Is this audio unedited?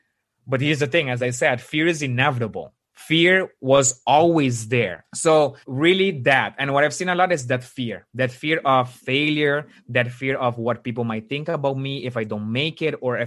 no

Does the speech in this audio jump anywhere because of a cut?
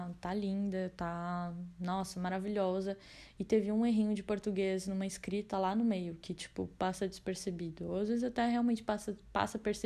no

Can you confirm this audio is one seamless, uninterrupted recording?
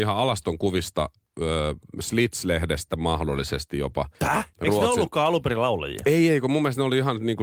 no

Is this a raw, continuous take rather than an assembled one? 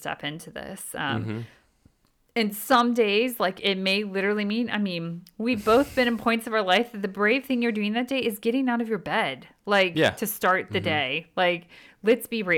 yes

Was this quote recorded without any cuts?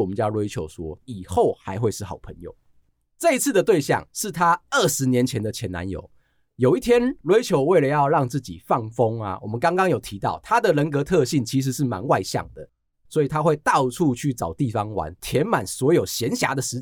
no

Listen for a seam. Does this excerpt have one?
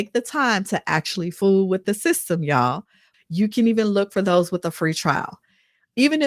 yes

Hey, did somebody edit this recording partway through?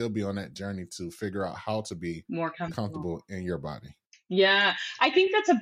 no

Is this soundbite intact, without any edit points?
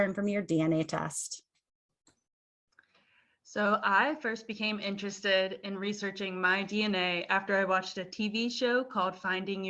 yes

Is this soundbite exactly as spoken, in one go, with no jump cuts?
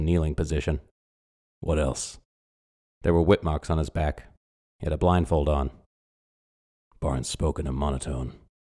yes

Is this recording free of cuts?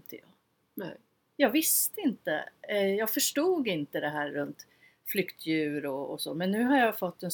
yes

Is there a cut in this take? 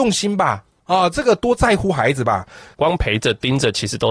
yes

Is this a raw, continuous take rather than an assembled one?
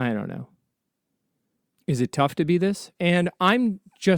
no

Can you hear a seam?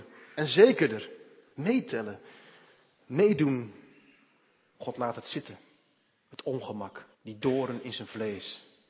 yes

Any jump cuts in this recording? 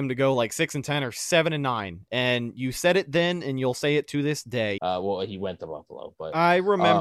yes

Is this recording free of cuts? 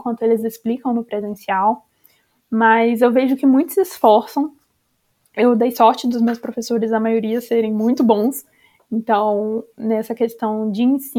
yes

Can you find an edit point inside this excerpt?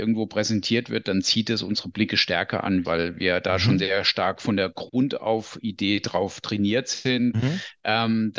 yes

